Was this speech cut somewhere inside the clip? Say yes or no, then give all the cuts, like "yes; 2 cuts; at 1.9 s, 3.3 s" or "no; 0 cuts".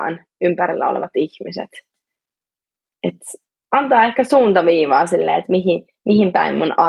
no; 0 cuts